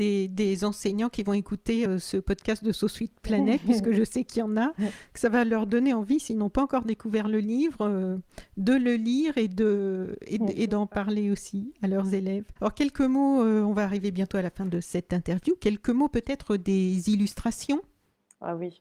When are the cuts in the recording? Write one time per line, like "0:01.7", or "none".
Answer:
none